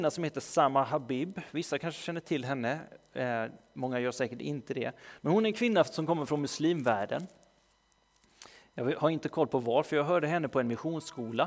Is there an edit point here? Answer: no; 0 cuts

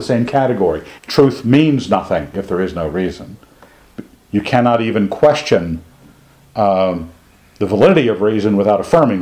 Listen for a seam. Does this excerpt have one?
yes; 1 cut; at 1.0 s

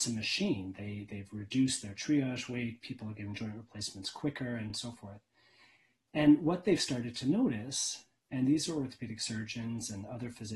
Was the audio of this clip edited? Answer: no; 0 cuts

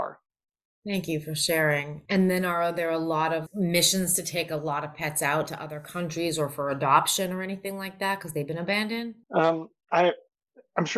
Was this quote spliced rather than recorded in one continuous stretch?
yes; 3 cuts; at 2.1 s, 3.5 s, 9.2 s

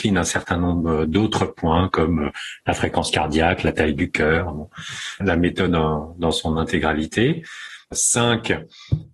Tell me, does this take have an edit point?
yes; 2 cuts; at 5.2 s, 7.9 s

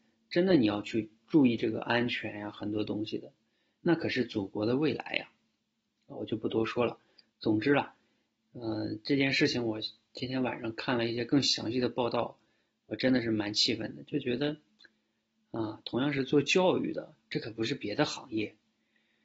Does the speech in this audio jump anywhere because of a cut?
yes; 1 cut; at 17.2 s

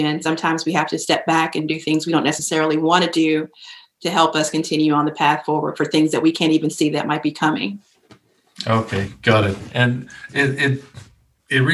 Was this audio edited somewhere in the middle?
no; 0 cuts

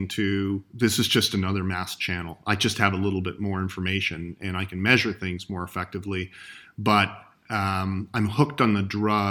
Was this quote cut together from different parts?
no; 0 cuts

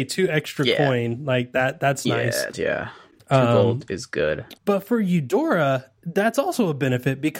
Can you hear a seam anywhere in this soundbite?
yes; 3 cuts; at 2.5 s, 4.6 s, 6.0 s

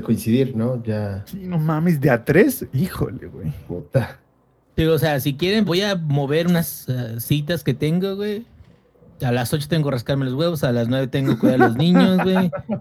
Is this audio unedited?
no; 2 cuts; at 4.6 s, 5.7 s

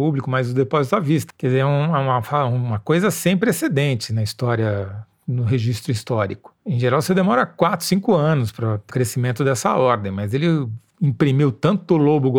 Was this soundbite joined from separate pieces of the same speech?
yes; 1 cut; at 8.9 s

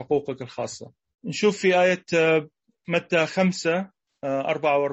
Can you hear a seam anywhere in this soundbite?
yes; 1 cut; at 1.1 s

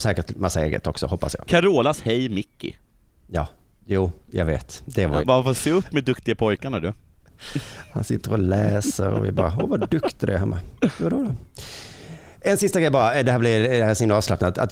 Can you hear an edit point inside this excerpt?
yes; 1 cut; at 5.2 s

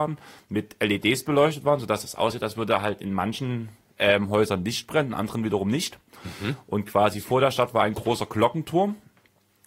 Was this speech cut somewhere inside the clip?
no; 0 cuts

